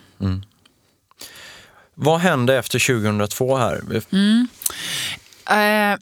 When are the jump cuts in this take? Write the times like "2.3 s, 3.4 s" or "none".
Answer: 4.0 s